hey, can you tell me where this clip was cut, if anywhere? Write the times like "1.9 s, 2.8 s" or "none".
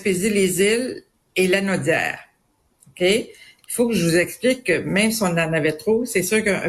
3.6 s